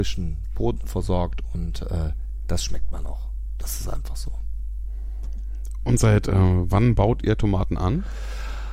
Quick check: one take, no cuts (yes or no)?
yes